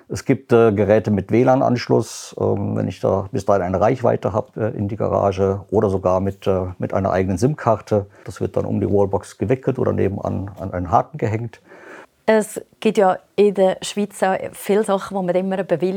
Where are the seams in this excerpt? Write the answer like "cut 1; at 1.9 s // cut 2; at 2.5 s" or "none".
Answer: cut 1; at 8.2 s // cut 2; at 12.0 s

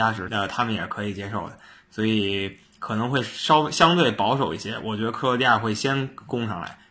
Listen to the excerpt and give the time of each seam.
none

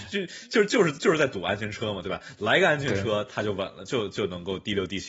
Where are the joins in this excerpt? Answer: none

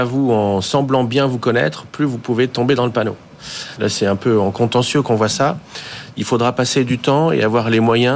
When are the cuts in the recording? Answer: cut 1; at 3.8 s // cut 2; at 6.1 s

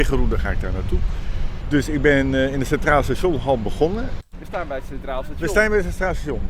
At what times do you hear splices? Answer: cut 1; at 1.6 s // cut 2; at 4.2 s

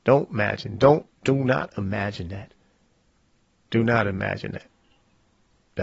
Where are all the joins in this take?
none

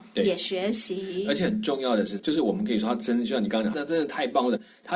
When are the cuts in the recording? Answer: cut 1; at 2.2 s // cut 2; at 3.7 s

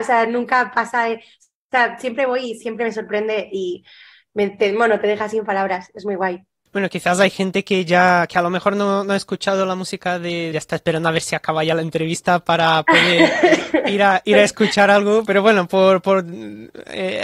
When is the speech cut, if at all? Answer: cut 1; at 10.5 s // cut 2; at 15.3 s

